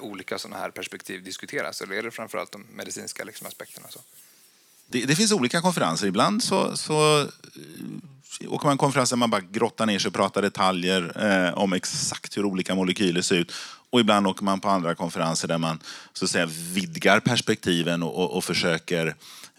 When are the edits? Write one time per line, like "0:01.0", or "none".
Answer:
0:13.9